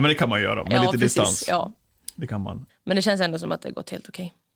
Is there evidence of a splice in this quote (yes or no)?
yes